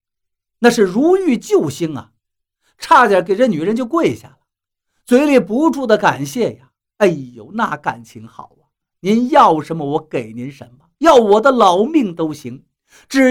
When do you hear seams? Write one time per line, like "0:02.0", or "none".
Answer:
0:08.9